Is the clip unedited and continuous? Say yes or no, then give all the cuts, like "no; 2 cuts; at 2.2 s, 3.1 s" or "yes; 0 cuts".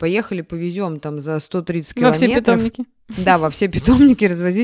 yes; 0 cuts